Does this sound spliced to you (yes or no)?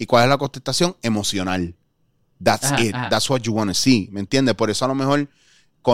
no